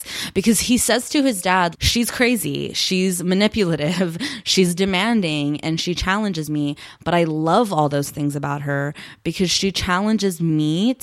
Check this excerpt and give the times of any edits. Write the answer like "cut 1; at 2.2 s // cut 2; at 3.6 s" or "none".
cut 1; at 1.7 s